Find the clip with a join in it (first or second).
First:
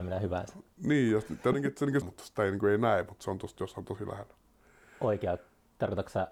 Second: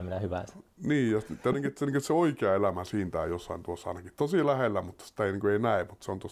first